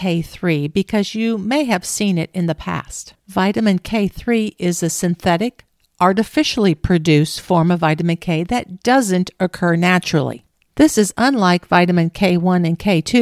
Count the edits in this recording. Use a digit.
1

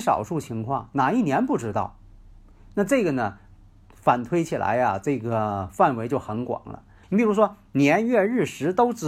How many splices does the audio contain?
1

